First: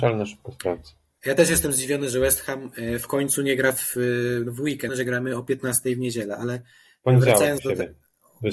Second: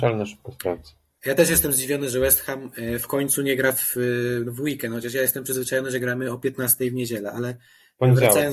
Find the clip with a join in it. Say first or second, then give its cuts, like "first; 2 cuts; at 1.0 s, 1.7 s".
first; 1 cut; at 4.9 s